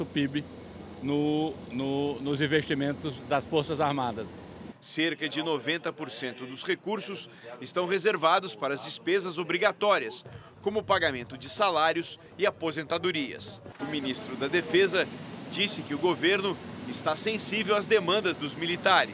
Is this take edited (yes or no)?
yes